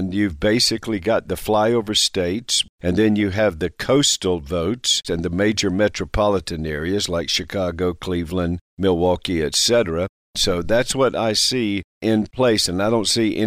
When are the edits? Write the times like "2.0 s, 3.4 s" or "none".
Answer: 5.0 s

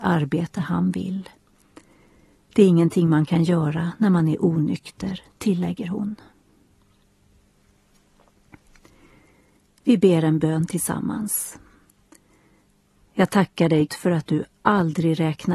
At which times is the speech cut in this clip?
13.9 s

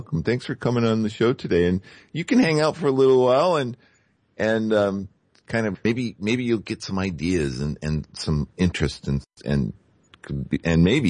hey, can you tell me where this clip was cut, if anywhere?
none

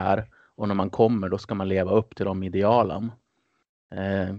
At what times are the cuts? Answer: none

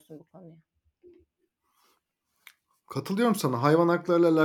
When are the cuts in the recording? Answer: none

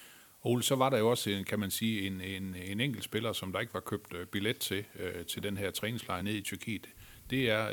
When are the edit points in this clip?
6.2 s

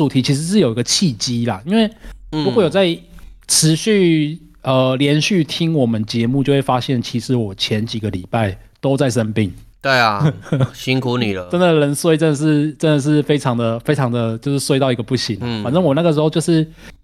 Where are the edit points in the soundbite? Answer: none

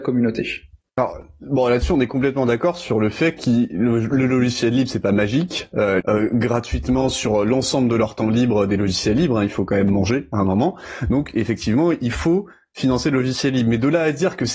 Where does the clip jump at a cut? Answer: 6.0 s

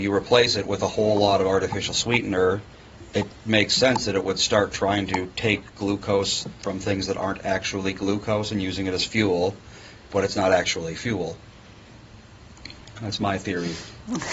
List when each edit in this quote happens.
none

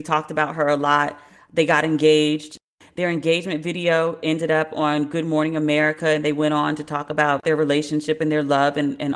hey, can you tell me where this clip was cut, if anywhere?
none

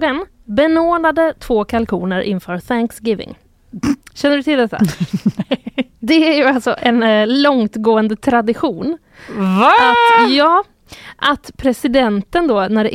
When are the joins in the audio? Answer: 6.8 s

